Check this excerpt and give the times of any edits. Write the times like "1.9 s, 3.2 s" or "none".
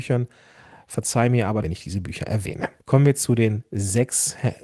1.6 s, 2.8 s